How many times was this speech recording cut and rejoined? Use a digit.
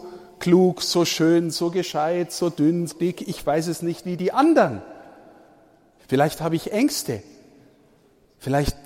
2